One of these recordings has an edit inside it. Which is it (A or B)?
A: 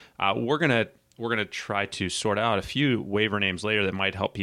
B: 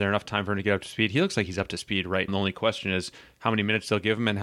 B